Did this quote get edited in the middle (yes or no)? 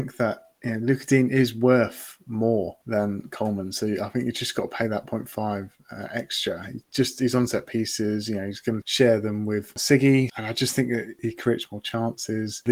no